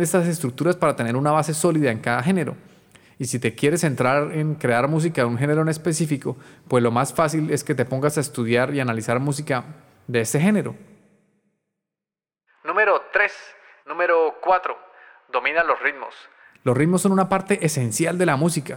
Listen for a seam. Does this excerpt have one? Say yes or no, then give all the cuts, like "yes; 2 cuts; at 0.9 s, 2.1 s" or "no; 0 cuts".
yes; 1 cut; at 13.8 s